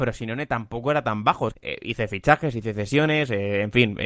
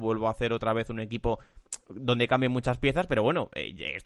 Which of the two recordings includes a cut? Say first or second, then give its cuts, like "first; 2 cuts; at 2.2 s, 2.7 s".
first; 1 cut; at 1.5 s